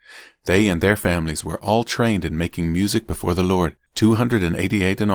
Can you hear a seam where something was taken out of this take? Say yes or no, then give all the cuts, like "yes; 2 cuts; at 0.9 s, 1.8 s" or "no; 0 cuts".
yes; 1 cut; at 3.9 s